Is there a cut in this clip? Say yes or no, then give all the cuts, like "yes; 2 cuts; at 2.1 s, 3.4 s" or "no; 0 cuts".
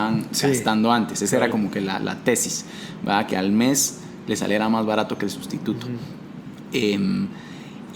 no; 0 cuts